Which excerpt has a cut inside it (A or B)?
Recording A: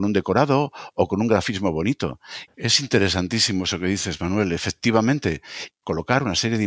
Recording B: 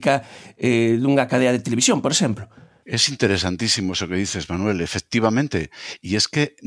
A